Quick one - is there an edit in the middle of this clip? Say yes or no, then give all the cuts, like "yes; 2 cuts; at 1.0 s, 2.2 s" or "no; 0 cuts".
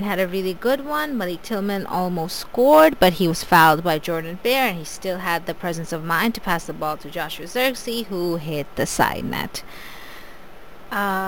no; 0 cuts